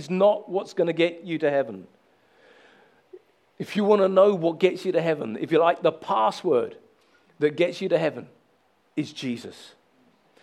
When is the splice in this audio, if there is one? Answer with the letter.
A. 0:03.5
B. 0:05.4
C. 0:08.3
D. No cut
D